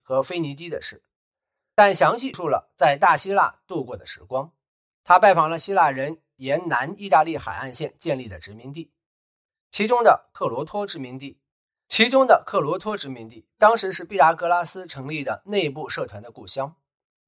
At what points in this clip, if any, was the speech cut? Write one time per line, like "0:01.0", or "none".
0:02.3